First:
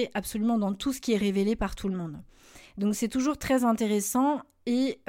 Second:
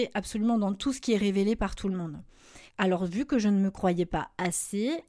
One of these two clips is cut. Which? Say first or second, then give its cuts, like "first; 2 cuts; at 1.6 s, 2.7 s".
second; 1 cut; at 2.7 s